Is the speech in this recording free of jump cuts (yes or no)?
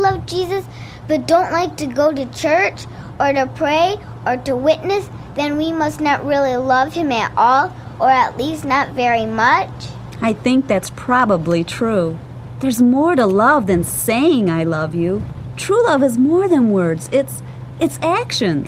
yes